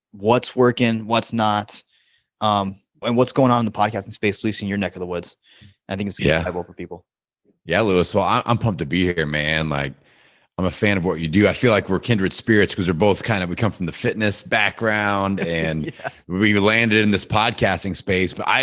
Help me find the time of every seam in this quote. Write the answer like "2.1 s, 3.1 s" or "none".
3.0 s